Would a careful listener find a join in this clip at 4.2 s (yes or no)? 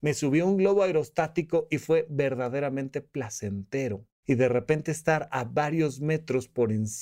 yes